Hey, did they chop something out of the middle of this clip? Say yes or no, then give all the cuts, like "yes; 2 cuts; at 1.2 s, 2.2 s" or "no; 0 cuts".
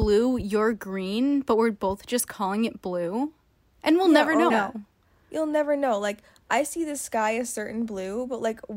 yes; 1 cut; at 4.5 s